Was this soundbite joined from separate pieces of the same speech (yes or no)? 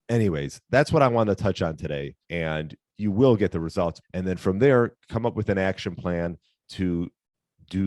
yes